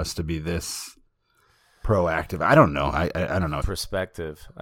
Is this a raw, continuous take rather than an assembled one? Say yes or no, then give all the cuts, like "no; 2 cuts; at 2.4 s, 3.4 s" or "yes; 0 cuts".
no; 1 cut; at 3.6 s